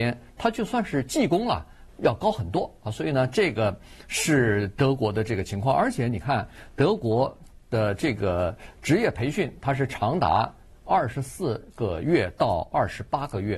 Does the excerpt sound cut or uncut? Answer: cut